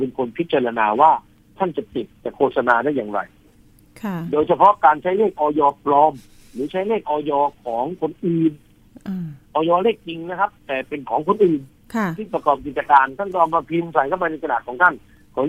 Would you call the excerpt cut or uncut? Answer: uncut